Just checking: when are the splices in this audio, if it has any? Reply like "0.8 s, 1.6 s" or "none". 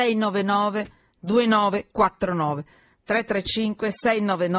none